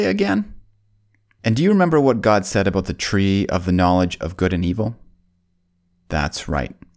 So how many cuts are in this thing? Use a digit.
1